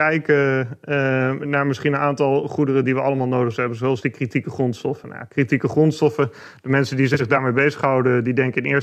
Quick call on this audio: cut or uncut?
uncut